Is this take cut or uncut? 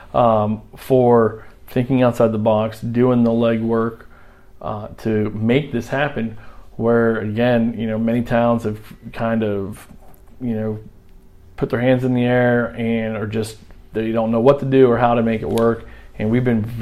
uncut